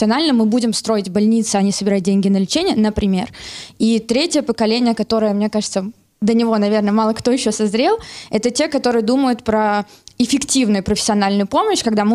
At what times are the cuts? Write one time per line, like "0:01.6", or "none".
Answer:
none